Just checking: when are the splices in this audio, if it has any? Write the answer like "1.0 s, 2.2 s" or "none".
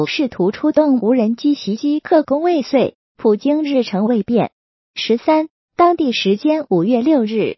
none